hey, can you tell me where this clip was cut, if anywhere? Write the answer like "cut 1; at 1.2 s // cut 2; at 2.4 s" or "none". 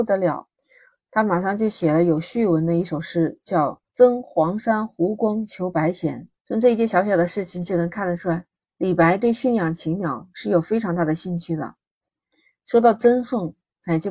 cut 1; at 3.9 s // cut 2; at 6.4 s